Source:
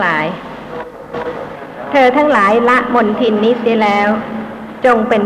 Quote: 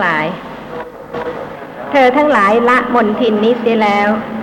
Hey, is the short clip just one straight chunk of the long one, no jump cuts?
yes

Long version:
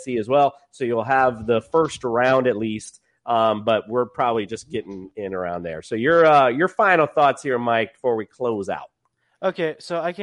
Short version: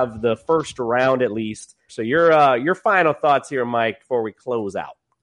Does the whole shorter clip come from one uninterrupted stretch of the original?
no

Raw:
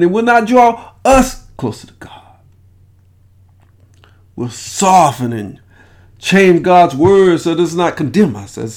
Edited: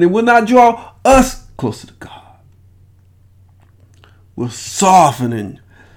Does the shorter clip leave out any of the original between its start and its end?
no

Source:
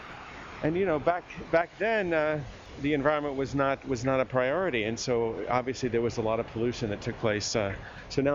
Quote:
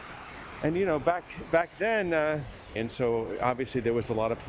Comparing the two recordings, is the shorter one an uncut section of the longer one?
no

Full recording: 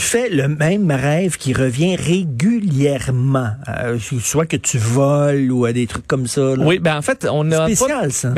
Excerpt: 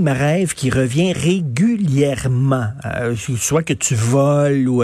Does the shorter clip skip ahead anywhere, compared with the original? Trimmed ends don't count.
no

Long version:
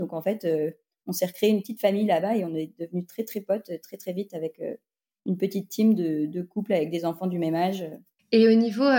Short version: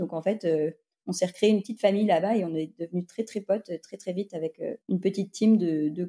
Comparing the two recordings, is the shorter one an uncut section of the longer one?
no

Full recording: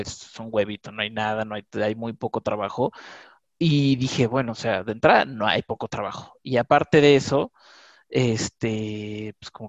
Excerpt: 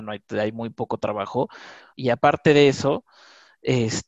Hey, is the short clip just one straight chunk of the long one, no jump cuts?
no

